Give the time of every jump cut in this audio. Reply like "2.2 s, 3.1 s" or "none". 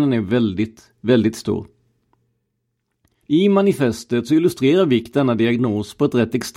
3.2 s